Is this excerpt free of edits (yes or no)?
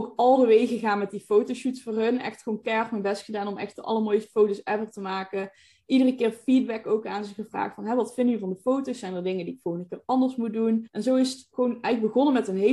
no